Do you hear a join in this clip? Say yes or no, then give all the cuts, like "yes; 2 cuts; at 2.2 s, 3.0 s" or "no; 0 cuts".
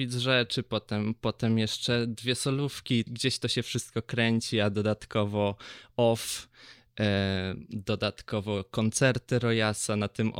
yes; 1 cut; at 3.1 s